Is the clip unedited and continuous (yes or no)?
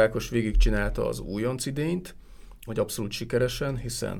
no